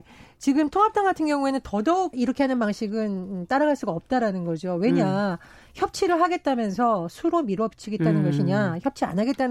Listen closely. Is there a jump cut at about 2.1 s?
yes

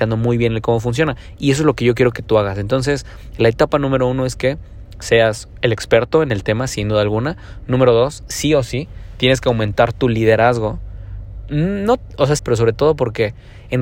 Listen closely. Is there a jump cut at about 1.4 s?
no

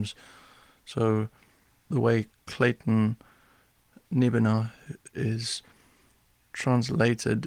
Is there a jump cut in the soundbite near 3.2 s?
no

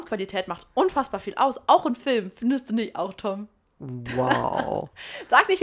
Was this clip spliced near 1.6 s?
no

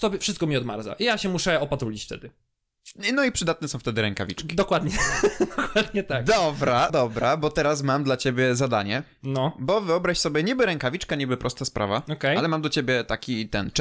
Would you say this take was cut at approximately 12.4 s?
no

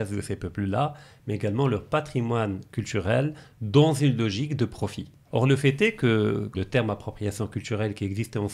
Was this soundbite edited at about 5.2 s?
yes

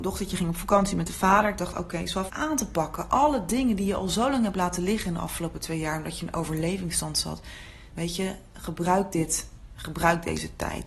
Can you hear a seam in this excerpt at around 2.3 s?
yes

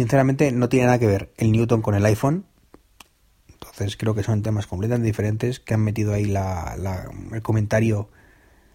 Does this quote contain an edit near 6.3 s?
no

